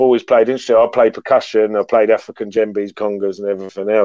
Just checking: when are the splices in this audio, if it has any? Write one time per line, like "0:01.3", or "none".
0:02.9